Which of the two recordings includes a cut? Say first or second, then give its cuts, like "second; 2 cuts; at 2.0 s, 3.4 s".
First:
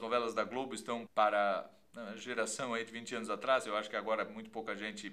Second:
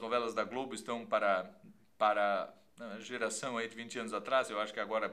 first; 1 cut; at 1.1 s